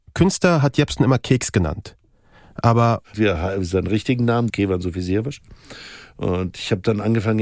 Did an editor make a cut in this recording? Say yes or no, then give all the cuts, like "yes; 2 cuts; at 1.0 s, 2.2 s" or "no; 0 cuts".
yes; 2 cuts; at 3.1 s, 4.5 s